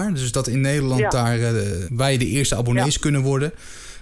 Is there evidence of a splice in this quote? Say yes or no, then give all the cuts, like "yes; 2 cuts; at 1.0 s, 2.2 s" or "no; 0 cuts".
yes; 1 cut; at 1.8 s